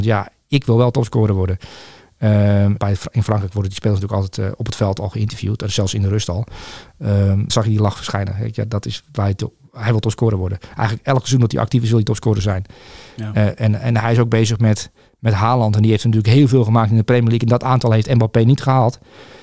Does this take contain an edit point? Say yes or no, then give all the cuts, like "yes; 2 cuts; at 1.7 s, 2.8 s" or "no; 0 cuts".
yes; 2 cuts; at 2.8 s, 7.5 s